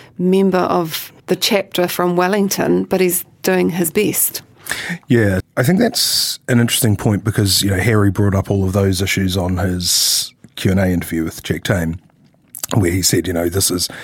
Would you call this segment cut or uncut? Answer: cut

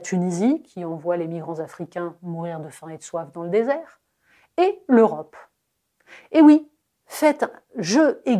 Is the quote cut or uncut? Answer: cut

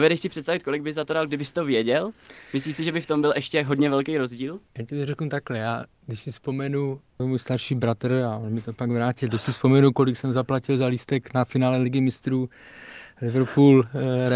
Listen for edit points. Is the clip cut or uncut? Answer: cut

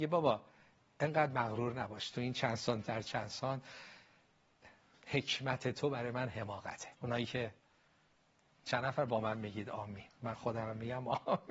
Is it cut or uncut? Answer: cut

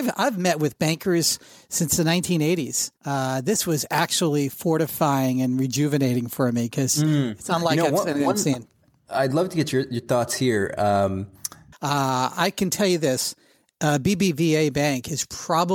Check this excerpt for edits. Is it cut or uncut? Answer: cut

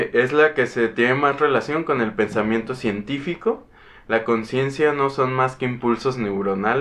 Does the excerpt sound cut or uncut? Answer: uncut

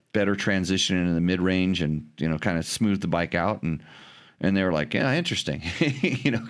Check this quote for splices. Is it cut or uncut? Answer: uncut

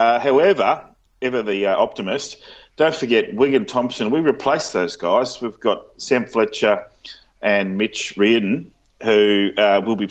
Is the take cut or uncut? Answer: uncut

